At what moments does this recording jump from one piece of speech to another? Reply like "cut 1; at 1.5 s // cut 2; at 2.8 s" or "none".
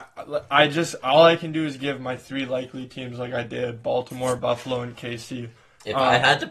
none